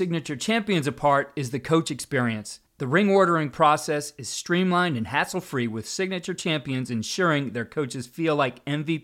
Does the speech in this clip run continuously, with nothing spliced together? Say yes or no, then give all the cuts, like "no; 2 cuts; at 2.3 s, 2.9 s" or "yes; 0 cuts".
no; 1 cut; at 2.7 s